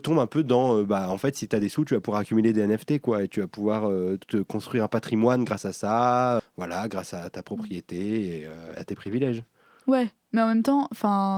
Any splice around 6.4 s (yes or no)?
yes